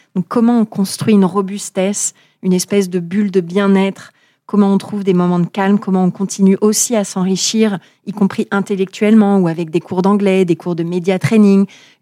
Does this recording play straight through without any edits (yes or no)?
yes